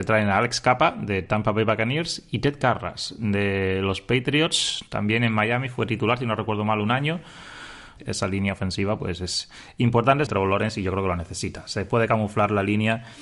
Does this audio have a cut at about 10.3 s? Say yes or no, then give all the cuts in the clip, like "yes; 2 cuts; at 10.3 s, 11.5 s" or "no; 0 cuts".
yes; 2 cuts; at 8.0 s, 10.3 s